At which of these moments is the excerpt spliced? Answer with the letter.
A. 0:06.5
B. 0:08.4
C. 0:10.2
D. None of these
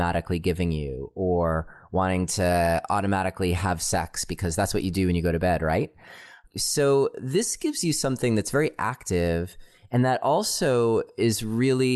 A